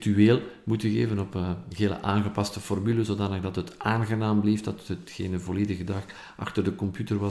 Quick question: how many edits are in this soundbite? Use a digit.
0